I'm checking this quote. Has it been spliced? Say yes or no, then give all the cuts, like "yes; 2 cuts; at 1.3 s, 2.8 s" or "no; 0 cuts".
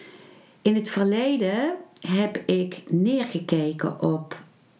no; 0 cuts